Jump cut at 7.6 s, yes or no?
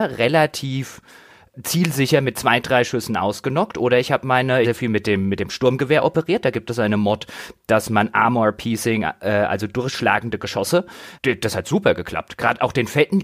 no